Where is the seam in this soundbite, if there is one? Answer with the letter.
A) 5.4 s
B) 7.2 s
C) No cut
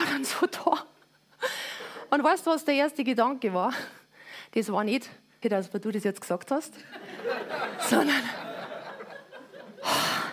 A